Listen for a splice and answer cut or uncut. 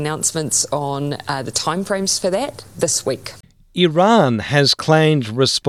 uncut